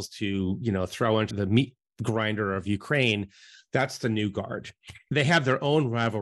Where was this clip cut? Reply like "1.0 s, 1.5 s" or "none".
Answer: 1.3 s